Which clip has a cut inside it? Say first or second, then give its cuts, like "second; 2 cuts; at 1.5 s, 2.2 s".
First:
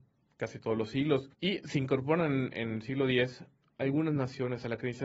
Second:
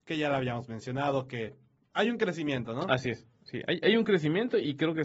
first; 1 cut; at 1.3 s